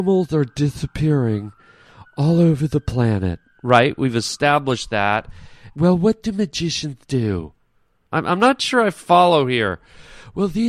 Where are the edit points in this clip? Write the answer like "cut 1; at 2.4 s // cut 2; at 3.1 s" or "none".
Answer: cut 1; at 5.7 s // cut 2; at 8.1 s